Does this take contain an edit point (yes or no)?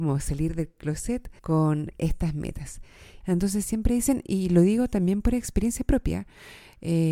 yes